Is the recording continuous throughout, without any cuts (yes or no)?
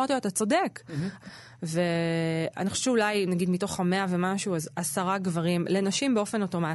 no